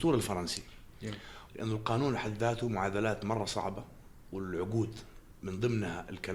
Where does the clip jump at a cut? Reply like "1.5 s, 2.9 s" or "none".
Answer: 1.5 s